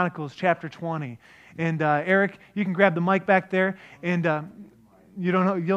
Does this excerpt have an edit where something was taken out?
no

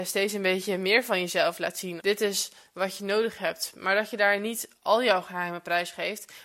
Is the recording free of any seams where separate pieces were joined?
no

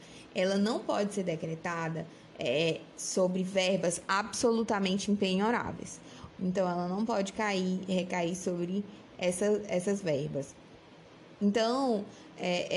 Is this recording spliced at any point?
yes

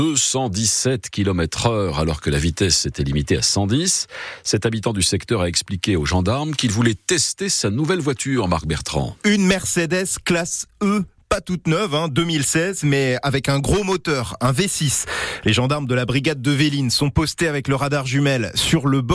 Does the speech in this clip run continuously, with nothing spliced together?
yes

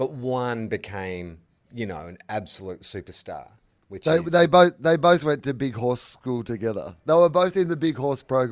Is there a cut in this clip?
no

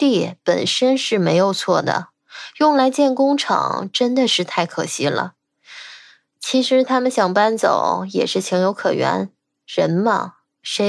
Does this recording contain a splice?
no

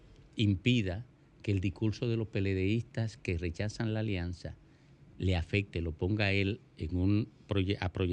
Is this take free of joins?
yes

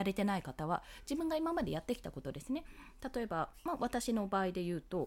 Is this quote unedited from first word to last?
yes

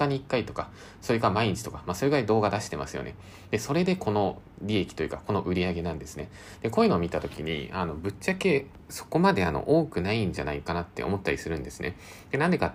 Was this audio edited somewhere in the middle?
no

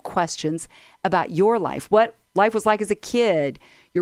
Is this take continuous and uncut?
yes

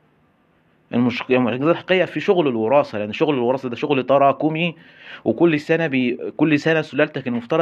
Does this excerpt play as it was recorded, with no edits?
yes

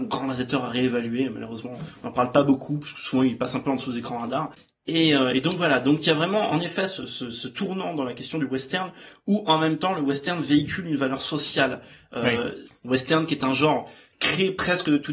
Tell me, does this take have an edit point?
yes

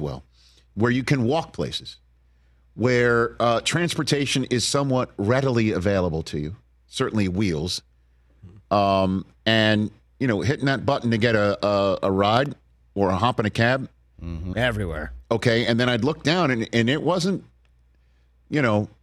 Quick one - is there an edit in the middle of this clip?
yes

